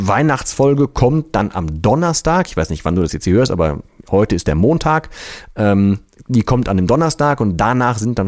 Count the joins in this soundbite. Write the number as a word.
zero